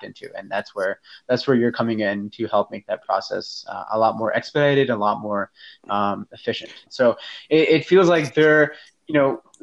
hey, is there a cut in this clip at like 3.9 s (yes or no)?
no